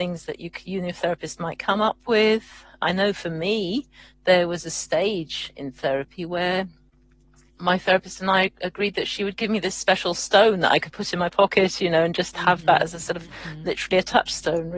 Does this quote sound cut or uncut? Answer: uncut